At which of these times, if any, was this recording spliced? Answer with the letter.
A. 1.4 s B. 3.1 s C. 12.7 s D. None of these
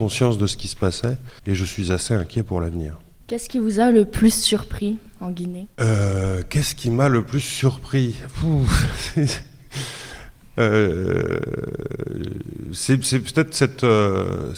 A